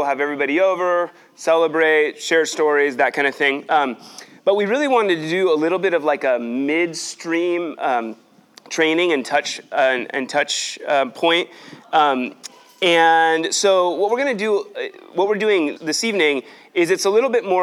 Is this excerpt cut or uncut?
cut